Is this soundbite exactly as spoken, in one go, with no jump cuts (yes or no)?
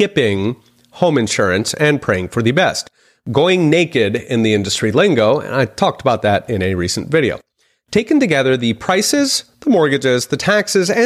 yes